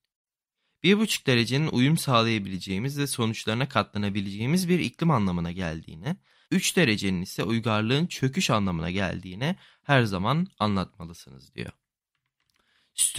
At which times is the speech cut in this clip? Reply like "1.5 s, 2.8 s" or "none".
6.4 s